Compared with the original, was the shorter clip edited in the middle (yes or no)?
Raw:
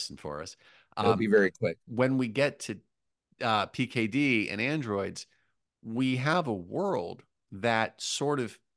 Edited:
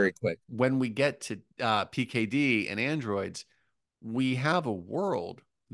yes